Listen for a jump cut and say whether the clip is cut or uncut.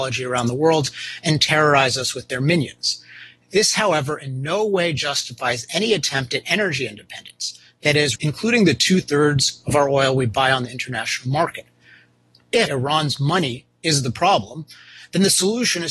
cut